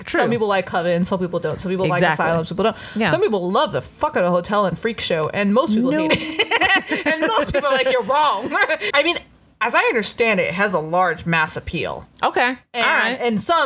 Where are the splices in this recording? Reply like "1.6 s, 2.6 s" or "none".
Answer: 8.9 s